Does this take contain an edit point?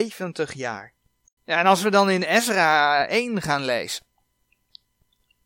yes; 1 cut; at 1.4 s

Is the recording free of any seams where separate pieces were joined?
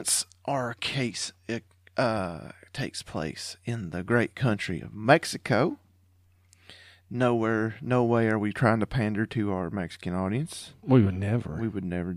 yes; 0 cuts

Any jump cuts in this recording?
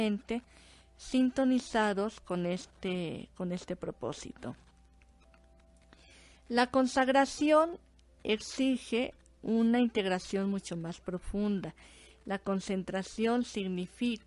no; 0 cuts

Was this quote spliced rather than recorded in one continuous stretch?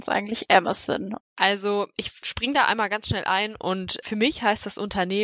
yes; 1 cut; at 1.2 s

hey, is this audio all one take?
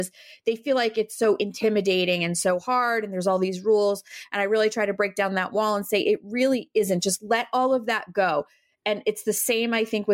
yes; 0 cuts

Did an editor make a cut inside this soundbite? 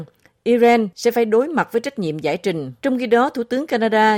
yes; 1 cut; at 2.8 s

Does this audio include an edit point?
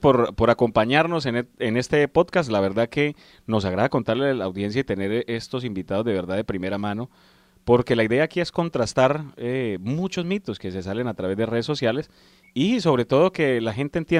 no; 0 cuts

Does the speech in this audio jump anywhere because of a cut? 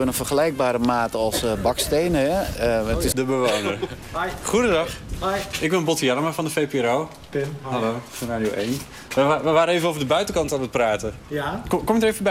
yes; 1 cut; at 3.1 s

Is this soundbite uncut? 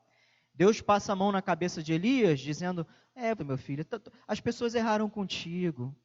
no; 1 cut; at 3.4 s

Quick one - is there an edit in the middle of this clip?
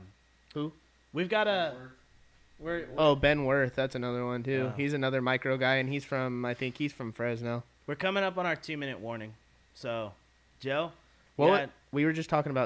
no; 0 cuts

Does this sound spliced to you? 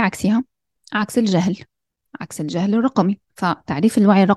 yes; 1 cut; at 3.2 s

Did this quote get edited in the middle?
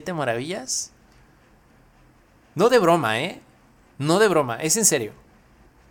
no; 0 cuts

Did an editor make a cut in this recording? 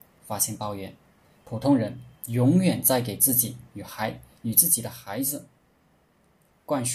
yes; 1 cut; at 1.3 s

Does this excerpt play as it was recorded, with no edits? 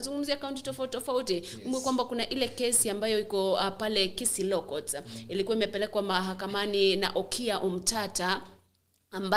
yes; 0 cuts

